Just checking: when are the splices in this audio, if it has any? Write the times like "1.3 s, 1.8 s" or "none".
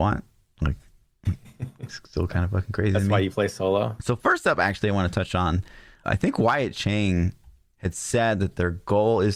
4.0 s, 6.0 s